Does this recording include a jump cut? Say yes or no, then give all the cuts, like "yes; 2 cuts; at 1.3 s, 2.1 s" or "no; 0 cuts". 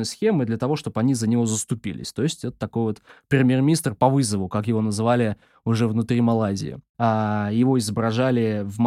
yes; 1 cut; at 6.9 s